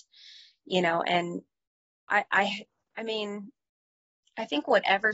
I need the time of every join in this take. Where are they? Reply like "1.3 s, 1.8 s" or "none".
2.1 s